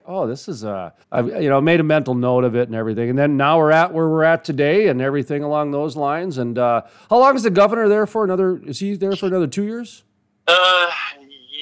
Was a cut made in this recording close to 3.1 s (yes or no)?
no